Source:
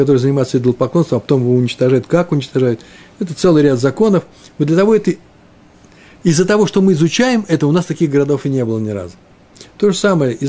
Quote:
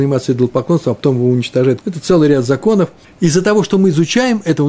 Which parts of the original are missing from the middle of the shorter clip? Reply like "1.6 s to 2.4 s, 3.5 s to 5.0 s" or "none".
2.1 s to 3.2 s, 4.4 s to 6.1 s